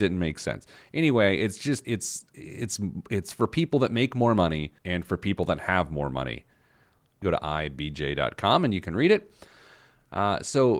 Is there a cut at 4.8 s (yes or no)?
yes